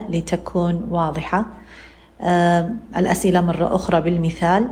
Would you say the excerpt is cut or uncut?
uncut